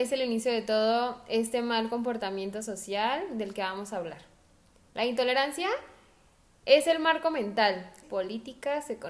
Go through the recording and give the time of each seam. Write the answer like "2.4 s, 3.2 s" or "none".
8.0 s